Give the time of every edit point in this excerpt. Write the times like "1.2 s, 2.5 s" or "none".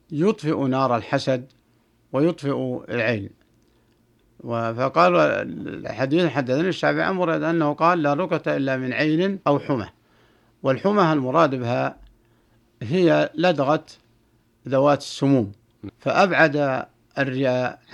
9.4 s, 15.9 s